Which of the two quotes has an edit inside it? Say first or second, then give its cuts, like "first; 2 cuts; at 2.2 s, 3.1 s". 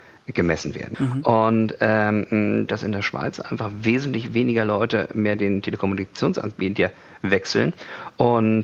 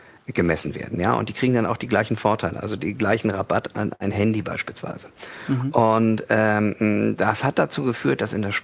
first; 2 cuts; at 0.9 s, 2.7 s